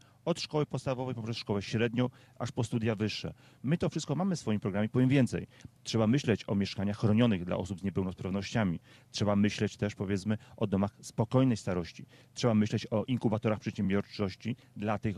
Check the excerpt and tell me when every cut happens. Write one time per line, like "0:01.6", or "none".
0:03.6
0:05.8